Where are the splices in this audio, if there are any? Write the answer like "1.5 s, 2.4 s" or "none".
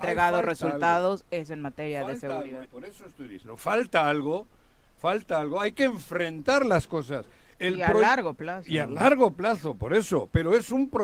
2.7 s, 7.5 s